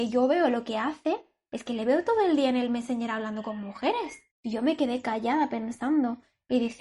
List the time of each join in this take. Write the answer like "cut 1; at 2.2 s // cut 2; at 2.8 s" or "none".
cut 1; at 4.3 s